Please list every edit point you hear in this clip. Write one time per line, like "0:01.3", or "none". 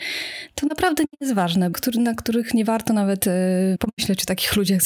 0:01.7
0:03.8